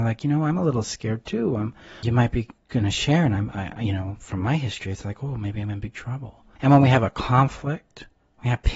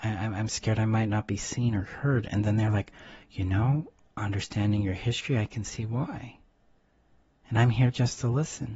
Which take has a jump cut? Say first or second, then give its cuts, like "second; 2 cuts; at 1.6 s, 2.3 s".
first; 2 cuts; at 2.0 s, 6.6 s